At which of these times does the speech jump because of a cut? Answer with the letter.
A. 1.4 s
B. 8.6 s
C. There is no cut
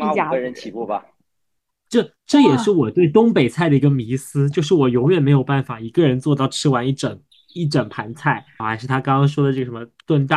B